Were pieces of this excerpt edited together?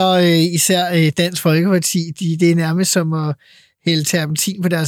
no; 0 cuts

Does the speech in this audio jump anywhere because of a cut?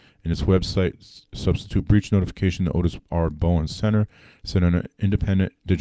no; 0 cuts

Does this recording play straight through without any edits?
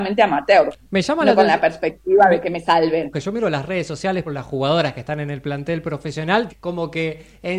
no; 3 cuts; at 3.1 s, 4.3 s, 6.5 s

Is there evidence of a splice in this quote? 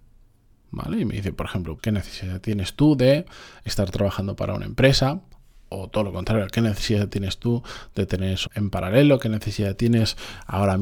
yes; 2 cuts; at 1.8 s, 8.5 s

